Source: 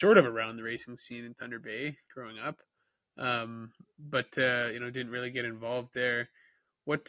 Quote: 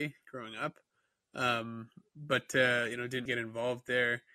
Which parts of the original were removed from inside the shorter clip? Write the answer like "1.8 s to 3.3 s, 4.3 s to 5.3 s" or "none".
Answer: 5.1 s to 5.3 s